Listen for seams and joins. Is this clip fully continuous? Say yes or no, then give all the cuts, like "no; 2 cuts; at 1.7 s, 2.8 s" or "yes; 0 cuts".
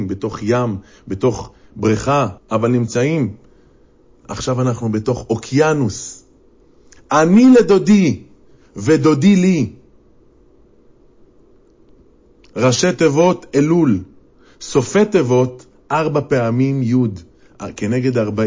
no; 1 cut; at 2.4 s